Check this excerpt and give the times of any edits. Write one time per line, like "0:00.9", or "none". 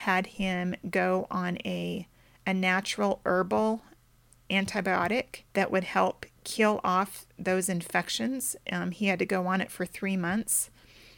0:05.5